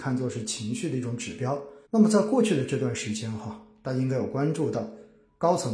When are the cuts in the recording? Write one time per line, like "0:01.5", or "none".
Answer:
0:01.9